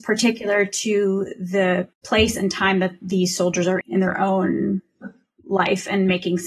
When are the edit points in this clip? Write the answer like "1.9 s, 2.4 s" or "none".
1.9 s, 3.8 s